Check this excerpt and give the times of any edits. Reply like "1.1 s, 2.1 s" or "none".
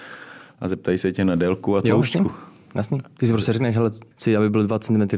4.1 s